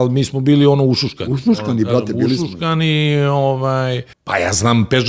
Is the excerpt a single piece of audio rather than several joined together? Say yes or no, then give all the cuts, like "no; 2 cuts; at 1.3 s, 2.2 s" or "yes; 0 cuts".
no; 1 cut; at 4.1 s